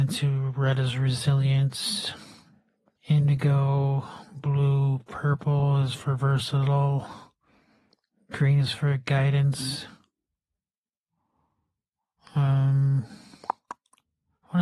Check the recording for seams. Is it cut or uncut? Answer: cut